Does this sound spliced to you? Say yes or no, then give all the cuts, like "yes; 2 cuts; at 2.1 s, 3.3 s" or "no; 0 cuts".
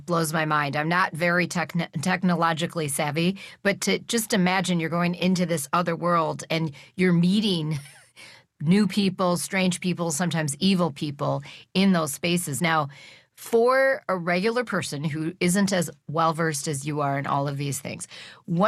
yes; 1 cut; at 12.6 s